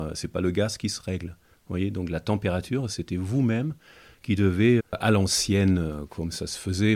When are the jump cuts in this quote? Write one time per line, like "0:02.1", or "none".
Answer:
0:04.8